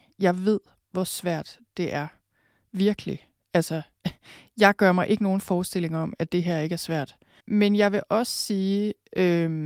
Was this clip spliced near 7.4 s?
yes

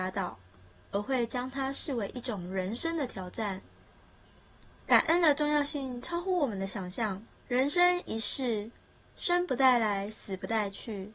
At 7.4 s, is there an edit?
yes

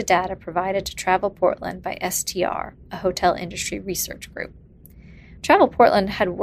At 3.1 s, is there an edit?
no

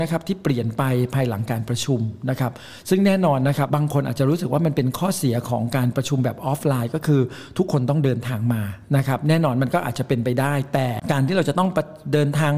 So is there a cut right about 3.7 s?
yes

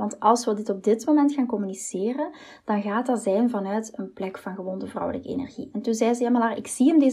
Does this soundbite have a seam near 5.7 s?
no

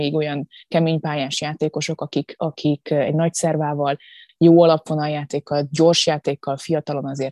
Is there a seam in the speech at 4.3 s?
yes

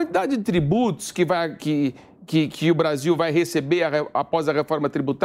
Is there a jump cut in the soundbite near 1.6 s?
yes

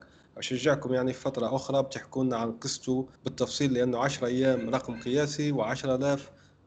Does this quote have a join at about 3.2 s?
yes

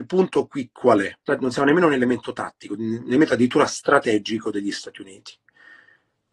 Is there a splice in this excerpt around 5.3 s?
no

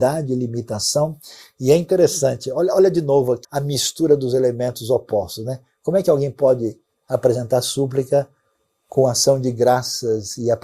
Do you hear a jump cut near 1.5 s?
no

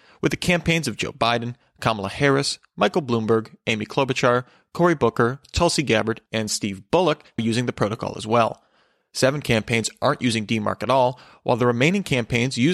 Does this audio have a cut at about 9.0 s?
no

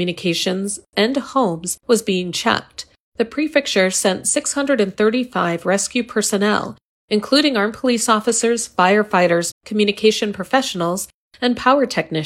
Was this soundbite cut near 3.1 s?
no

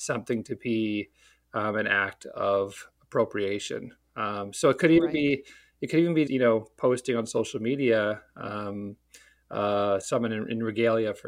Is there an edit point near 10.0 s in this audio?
yes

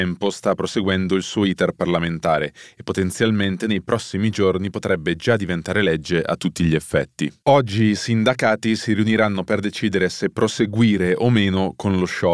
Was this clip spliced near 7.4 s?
yes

